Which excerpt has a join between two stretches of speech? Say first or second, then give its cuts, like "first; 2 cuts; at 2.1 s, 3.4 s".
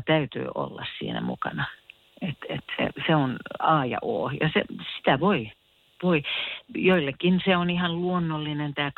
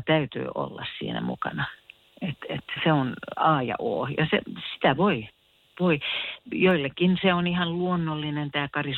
second; 1 cut; at 2.8 s